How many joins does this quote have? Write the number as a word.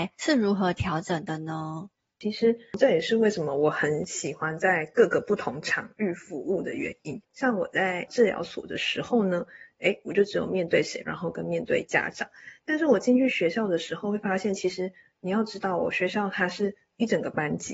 one